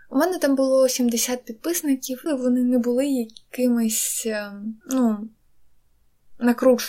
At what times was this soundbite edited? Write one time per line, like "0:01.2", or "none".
0:02.3
0:04.8